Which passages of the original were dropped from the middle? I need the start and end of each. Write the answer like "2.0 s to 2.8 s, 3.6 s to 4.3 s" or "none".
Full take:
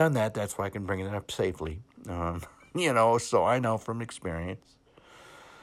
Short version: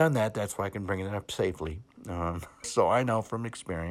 2.6 s to 3.2 s

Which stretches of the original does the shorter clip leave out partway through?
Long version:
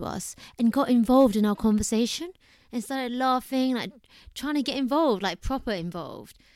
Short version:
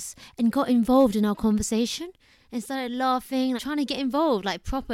3.8 s to 4.3 s

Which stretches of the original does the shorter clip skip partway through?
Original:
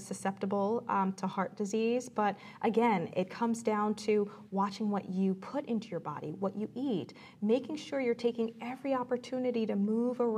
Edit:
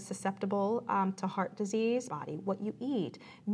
2.1 s to 6.0 s

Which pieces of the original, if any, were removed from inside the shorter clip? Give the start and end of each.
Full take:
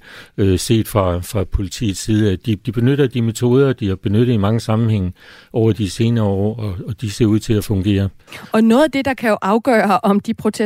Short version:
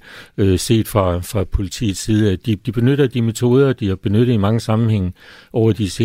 none

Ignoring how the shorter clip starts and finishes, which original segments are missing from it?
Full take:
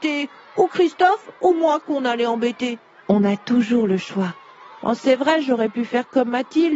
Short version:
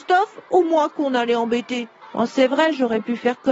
2.9 s to 4.7 s

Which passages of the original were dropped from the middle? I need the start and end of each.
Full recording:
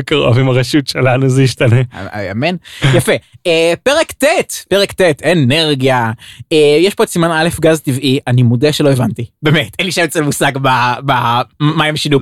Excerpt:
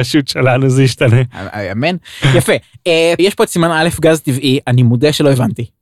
3.8 s to 6.8 s

